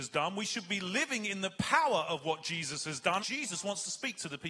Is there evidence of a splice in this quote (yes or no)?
yes